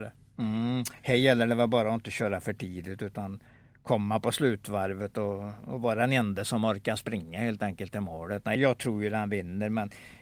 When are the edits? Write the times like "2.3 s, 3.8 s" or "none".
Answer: 1.0 s, 8.6 s